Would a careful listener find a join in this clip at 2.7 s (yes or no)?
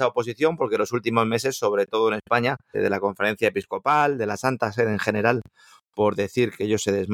yes